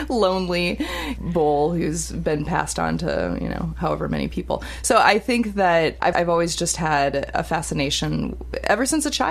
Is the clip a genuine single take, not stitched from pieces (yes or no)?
no